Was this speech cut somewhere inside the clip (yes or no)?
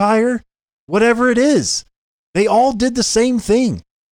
no